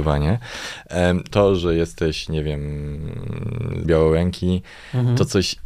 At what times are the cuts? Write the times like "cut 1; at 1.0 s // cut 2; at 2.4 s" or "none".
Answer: cut 1; at 1.3 s // cut 2; at 3.8 s